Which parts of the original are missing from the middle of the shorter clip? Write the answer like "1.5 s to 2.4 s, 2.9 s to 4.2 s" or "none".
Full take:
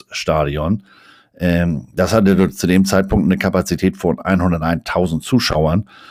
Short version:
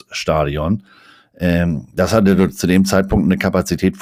none